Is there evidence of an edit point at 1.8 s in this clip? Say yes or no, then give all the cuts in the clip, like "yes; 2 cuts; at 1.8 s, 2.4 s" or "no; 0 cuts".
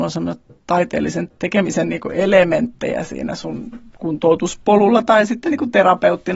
no; 0 cuts